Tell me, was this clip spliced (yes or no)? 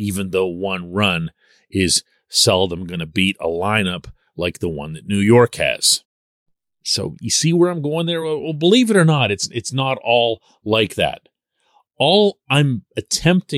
no